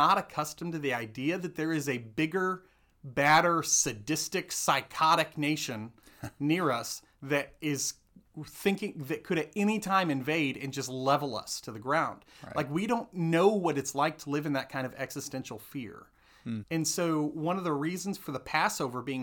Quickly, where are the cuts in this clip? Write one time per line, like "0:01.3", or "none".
0:16.6